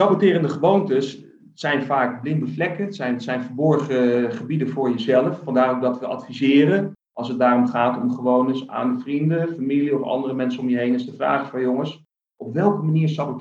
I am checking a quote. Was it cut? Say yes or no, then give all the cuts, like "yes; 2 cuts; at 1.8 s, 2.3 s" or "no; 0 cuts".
no; 0 cuts